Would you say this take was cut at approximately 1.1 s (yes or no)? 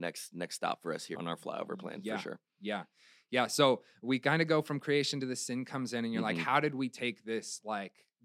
yes